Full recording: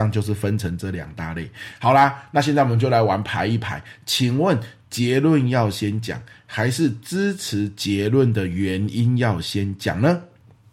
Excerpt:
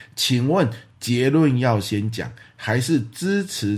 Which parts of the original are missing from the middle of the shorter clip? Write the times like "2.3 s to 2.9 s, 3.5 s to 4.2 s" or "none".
none